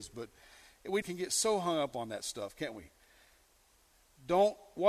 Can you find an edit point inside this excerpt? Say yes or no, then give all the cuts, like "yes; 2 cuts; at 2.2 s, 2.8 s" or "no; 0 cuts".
yes; 1 cut; at 1.0 s